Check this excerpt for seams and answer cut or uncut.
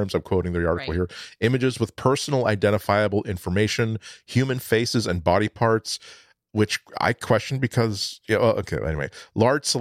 uncut